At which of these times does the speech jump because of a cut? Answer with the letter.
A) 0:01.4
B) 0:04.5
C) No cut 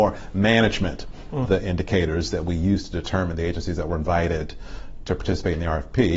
A